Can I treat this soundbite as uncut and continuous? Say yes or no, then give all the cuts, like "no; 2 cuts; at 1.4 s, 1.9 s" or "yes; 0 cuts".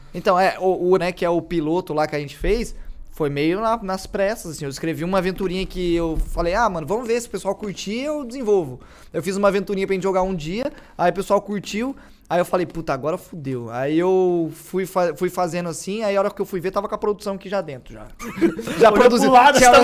no; 2 cuts; at 1.0 s, 18.2 s